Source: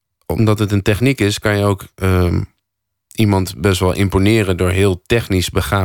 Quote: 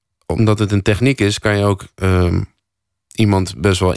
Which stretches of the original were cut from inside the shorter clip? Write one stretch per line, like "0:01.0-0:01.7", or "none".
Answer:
none